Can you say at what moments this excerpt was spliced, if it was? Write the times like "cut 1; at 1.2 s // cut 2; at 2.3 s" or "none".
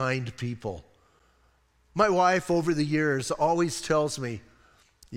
none